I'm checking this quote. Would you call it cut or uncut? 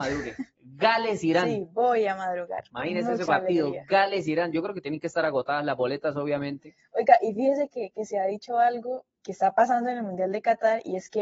cut